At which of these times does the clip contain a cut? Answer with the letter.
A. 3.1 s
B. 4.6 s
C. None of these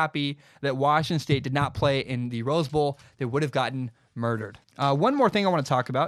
B